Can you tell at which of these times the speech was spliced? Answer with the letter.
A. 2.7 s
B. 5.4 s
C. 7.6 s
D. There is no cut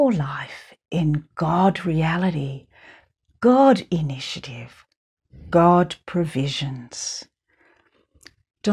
D